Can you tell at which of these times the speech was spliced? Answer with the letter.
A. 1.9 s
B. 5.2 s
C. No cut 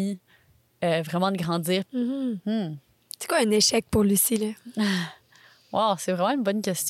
A